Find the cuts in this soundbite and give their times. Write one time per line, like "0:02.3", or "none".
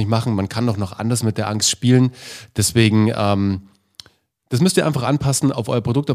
none